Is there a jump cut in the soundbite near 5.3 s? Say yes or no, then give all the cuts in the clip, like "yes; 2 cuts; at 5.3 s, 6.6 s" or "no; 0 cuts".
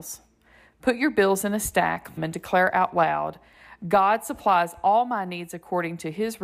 no; 1 cut; at 2.2 s